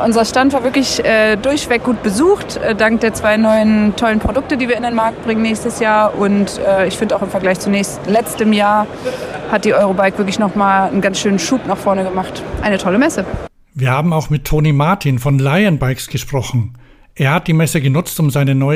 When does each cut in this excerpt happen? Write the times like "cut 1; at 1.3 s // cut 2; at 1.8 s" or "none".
none

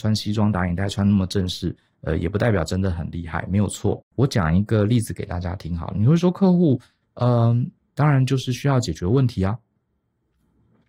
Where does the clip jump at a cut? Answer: cut 1; at 4.0 s // cut 2; at 8.0 s

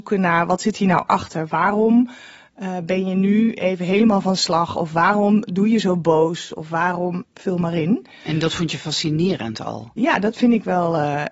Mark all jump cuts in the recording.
cut 1; at 7.2 s

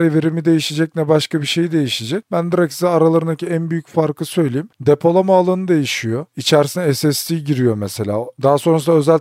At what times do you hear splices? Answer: none

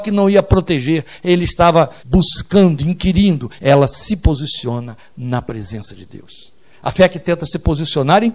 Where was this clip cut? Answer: cut 1; at 2.0 s // cut 2; at 3.6 s

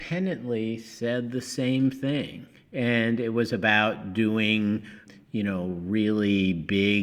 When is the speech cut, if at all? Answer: none

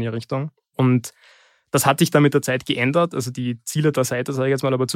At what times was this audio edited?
none

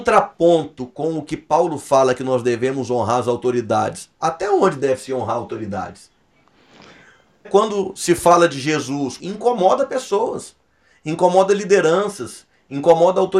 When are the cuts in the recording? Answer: cut 1; at 7.4 s // cut 2; at 9.2 s

